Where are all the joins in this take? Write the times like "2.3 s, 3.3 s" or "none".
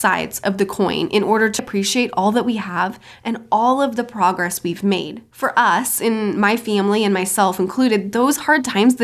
1.6 s, 5.3 s